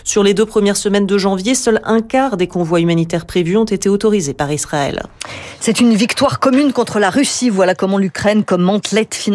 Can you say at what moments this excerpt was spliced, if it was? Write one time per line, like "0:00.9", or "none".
none